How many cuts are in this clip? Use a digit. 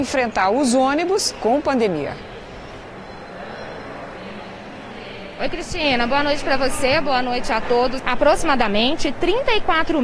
1